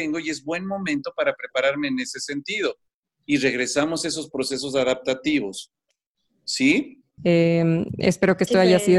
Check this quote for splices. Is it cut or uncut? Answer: cut